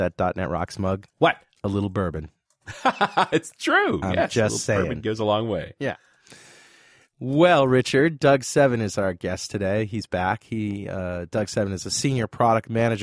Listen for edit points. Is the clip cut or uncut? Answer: cut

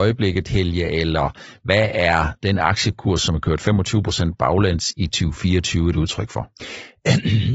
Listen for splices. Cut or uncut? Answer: uncut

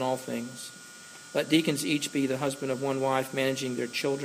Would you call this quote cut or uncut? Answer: uncut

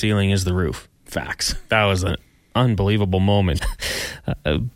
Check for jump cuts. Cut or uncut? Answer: cut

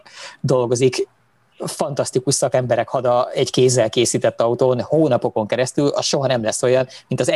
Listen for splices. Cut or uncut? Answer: uncut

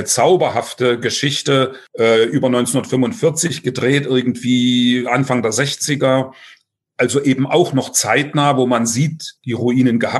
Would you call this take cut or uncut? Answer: uncut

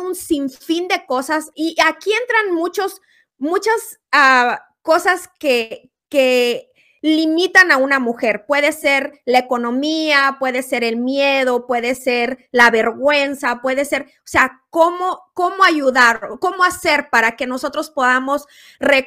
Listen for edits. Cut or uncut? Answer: cut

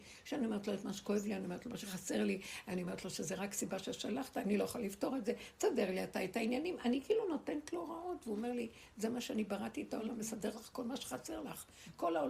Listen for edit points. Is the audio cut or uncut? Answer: uncut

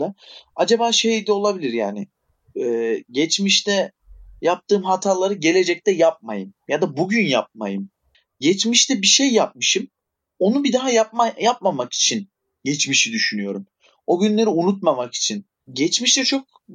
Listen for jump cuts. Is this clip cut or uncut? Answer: cut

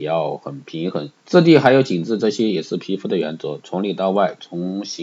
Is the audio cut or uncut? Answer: cut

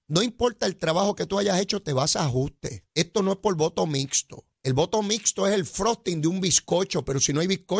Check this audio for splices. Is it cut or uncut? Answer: cut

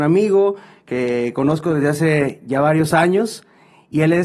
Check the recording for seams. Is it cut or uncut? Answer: uncut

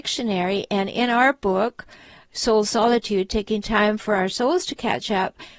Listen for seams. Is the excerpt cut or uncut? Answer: uncut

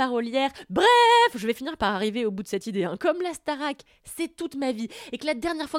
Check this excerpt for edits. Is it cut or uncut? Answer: uncut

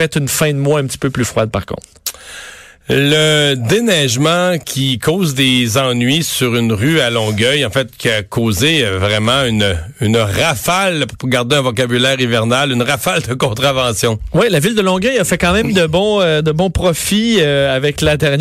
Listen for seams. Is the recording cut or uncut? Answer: uncut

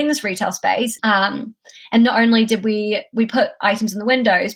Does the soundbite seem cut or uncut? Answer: cut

